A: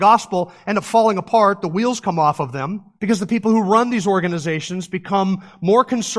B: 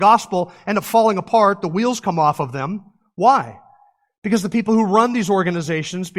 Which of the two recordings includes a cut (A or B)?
A